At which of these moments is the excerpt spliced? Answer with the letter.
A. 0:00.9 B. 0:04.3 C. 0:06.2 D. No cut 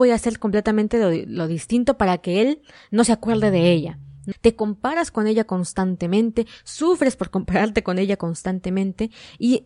B